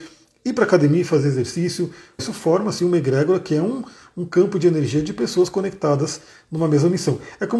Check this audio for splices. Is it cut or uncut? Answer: cut